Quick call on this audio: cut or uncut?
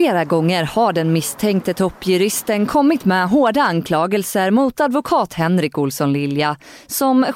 uncut